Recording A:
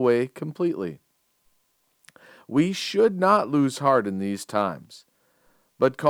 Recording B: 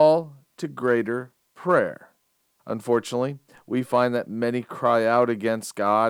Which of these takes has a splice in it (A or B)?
B